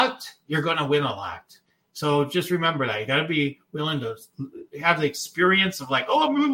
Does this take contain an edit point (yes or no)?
no